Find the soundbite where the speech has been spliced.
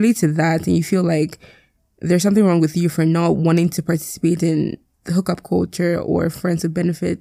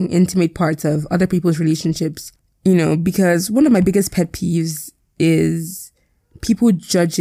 first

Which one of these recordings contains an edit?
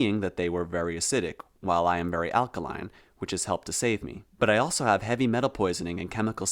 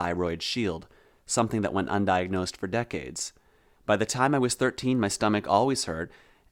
second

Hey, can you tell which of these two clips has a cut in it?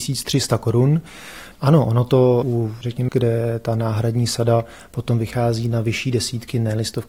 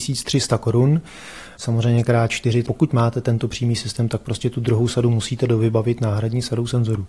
first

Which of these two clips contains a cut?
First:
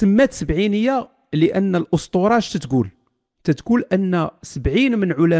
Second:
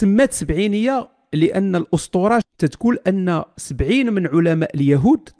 second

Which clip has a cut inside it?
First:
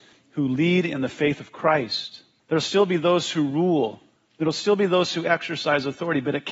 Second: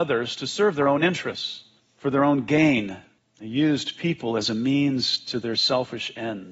first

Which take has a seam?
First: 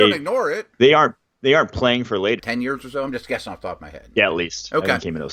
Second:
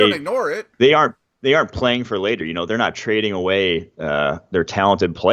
first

